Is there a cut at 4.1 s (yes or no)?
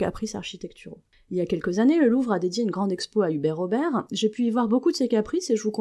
no